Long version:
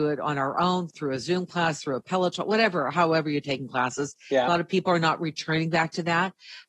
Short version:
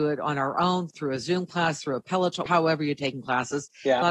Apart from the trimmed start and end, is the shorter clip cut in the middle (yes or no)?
yes